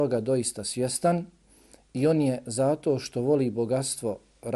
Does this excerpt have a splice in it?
no; 0 cuts

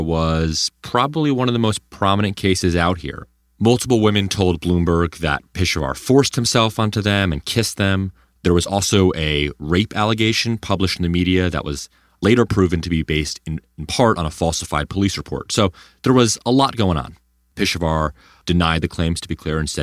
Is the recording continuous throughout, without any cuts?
yes; 0 cuts

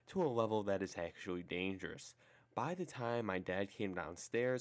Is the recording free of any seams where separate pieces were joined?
yes; 0 cuts

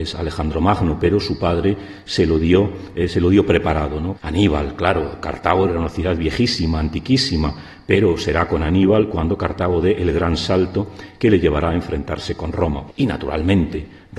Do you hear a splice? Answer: yes; 2 cuts; at 4.1 s, 12.9 s

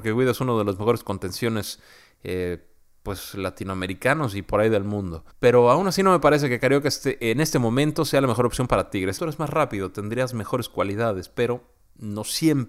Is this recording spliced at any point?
yes; 2 cuts; at 5.3 s, 9.2 s

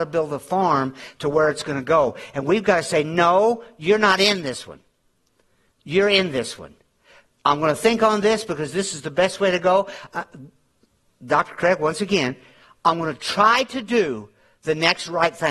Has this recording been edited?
no; 0 cuts

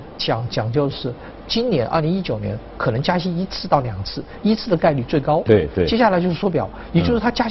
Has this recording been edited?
no; 0 cuts

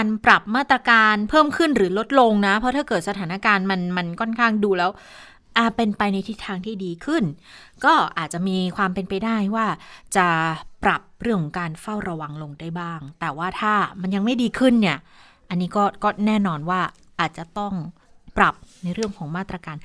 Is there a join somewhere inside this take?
no; 0 cuts

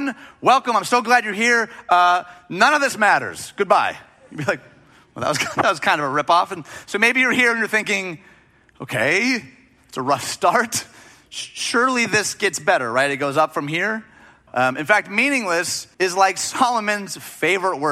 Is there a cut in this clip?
yes; 2 cuts; at 14.5 s, 15.9 s

